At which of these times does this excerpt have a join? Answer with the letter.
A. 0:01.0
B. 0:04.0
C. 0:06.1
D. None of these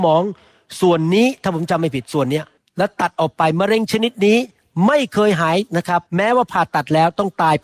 C